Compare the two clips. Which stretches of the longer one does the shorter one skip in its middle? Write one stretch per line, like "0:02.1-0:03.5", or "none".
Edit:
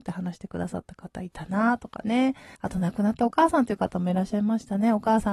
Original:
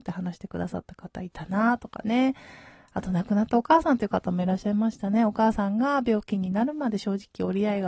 0:02.6-0:02.9